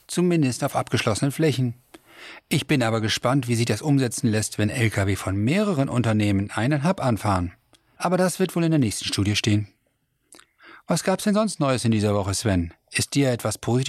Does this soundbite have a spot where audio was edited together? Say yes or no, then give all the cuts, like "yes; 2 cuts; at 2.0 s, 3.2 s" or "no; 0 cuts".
yes; 1 cut; at 7.9 s